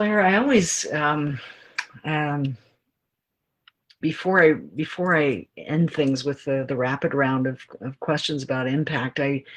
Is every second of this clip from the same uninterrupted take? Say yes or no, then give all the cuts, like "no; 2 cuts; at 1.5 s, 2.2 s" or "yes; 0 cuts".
no; 1 cut; at 4.0 s